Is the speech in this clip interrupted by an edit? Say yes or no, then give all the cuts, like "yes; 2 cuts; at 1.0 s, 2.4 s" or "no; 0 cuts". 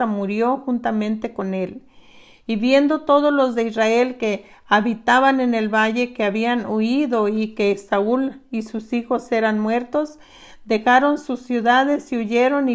no; 0 cuts